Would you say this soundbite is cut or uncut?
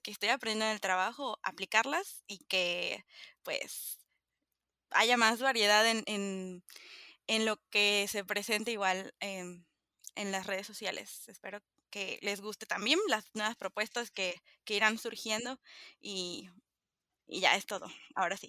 uncut